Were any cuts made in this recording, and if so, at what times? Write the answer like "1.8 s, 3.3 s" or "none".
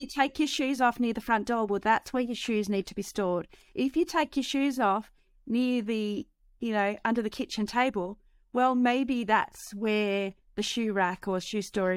none